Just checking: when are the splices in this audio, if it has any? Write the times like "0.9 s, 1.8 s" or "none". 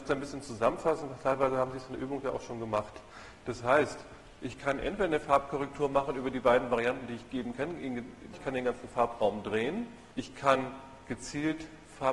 8.3 s, 10.1 s